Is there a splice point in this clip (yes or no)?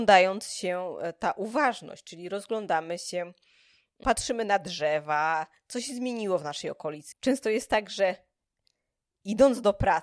yes